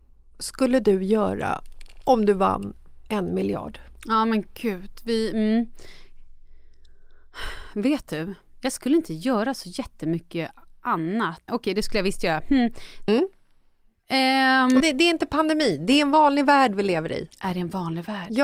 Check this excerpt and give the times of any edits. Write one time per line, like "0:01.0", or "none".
0:11.5
0:13.1
0:14.8